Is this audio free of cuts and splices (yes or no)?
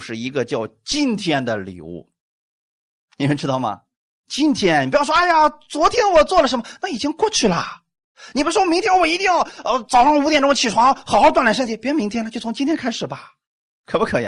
yes